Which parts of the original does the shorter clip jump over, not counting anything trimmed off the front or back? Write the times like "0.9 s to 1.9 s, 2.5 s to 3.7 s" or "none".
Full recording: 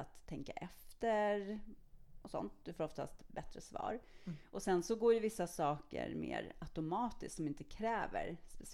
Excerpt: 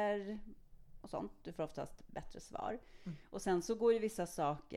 none

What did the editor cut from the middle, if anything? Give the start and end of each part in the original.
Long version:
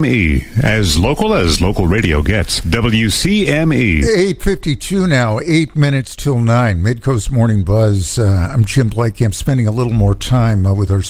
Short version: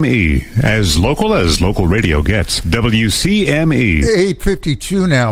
none

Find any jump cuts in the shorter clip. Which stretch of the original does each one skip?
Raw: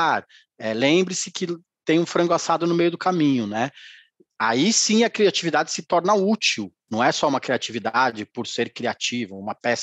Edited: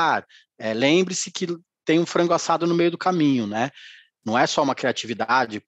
4.2 s to 6.8 s

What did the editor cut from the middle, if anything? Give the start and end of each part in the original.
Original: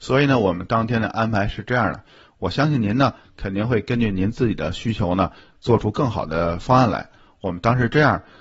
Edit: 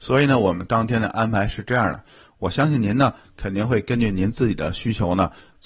none

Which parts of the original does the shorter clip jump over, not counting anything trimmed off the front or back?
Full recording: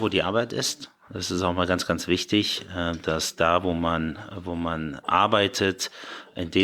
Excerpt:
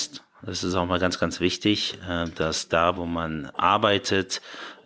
3.6 s to 4.4 s

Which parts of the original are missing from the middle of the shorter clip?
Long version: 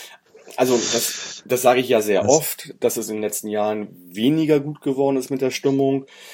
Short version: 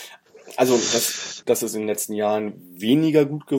1.4 s to 2.8 s

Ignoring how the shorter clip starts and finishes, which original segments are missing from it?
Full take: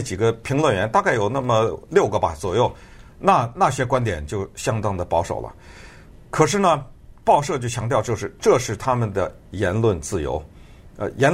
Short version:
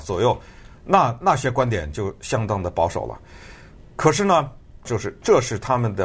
7.2 s to 8.0 s

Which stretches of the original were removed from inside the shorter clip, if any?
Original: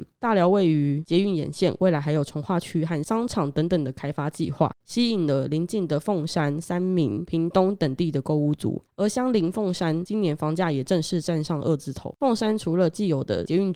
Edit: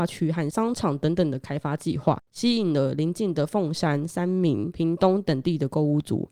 none

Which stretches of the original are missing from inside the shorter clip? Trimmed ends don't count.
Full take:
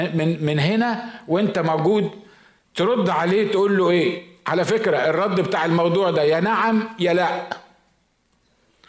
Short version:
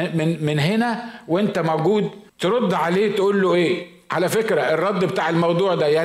2.3 s to 2.7 s

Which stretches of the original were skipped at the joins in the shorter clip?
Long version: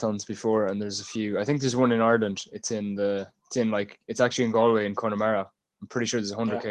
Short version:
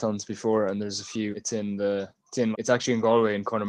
1.3 s to 2.5 s, 3.7 s to 4.0 s

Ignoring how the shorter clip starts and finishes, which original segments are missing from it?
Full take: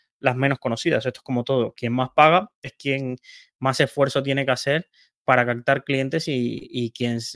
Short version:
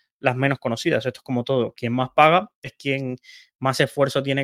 none

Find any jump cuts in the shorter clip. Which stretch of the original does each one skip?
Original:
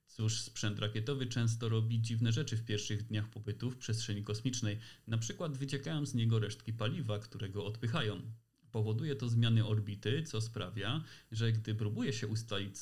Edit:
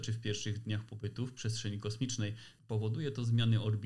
5.0 s to 8.6 s

